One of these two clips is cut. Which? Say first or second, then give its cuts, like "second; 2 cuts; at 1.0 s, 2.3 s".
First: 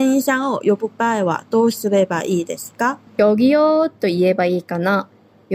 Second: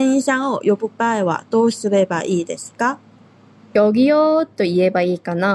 first; 1 cut; at 3.1 s